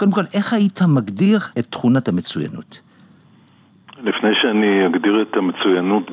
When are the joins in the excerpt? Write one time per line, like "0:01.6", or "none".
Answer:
0:01.5

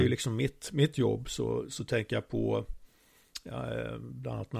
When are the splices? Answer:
none

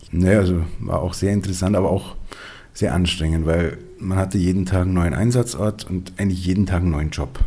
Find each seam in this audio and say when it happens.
none

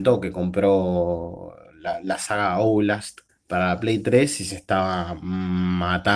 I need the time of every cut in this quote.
0:03.3

